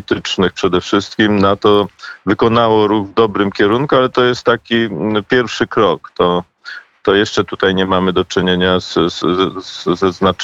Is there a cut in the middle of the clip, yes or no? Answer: yes